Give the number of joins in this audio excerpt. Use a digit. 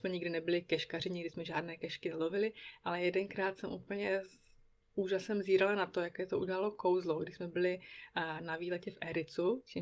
0